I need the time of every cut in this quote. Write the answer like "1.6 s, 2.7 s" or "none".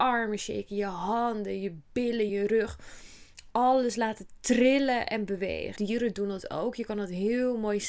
2.3 s, 5.8 s